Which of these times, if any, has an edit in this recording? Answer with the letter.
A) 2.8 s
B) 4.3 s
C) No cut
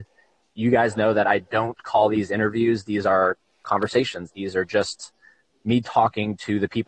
B